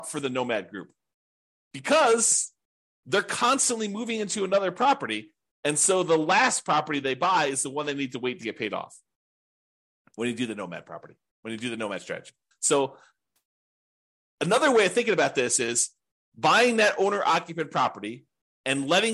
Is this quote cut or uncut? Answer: cut